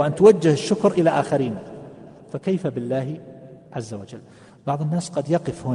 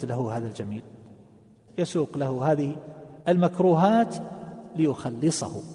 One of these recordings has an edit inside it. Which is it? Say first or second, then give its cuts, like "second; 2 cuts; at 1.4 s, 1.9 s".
second; 2 cuts; at 1.7 s, 3.2 s